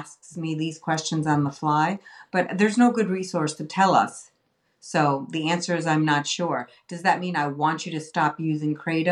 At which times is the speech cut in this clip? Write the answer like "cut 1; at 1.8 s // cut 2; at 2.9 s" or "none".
none